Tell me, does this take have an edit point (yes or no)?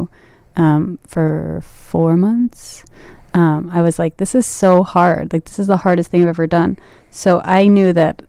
no